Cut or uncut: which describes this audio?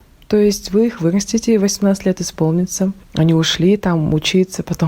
cut